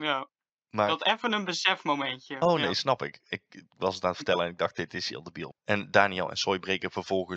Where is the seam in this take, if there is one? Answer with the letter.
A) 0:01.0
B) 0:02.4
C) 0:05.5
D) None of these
C